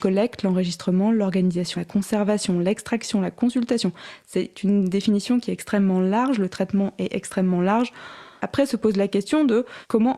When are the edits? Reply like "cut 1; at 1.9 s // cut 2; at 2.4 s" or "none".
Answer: cut 1; at 1.8 s // cut 2; at 8.4 s